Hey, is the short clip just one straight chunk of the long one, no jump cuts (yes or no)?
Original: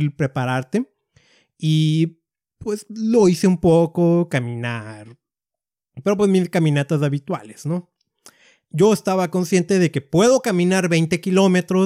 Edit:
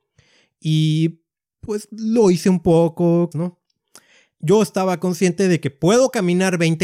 no